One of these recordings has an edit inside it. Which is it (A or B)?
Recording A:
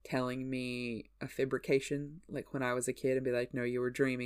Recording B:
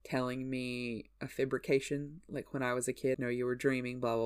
B